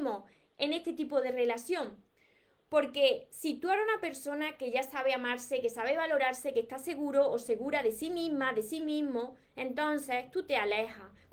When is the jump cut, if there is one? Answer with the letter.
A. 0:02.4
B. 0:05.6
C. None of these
C